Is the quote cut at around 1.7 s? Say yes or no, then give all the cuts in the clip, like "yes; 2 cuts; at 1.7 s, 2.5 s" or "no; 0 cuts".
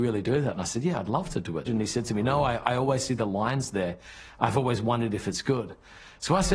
yes; 1 cut; at 1.7 s